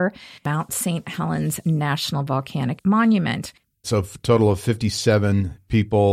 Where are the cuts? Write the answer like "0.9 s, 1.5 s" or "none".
3.8 s